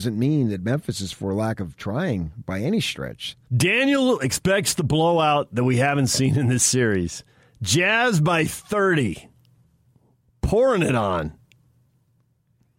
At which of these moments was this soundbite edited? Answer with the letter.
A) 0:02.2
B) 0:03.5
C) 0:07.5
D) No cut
B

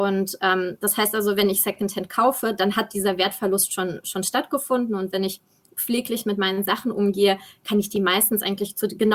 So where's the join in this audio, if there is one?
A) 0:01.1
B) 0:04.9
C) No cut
C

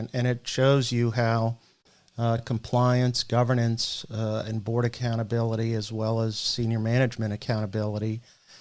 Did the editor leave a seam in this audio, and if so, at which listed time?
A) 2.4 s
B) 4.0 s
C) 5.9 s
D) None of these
D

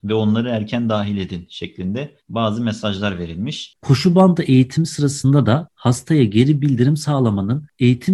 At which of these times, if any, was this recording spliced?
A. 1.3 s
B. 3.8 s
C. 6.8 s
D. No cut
B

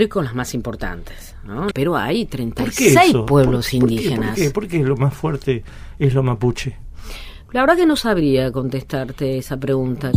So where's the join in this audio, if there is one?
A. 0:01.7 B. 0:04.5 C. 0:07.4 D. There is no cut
A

